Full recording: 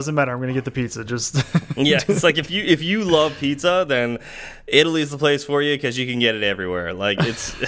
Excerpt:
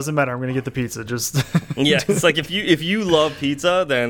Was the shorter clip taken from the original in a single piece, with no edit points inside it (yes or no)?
yes